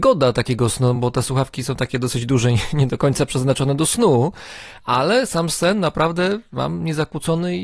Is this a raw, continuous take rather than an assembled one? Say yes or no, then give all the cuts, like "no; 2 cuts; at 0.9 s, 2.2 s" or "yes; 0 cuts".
yes; 0 cuts